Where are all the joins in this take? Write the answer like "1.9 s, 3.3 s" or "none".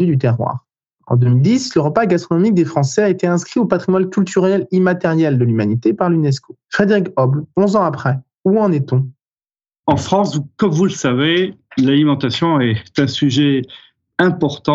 6.6 s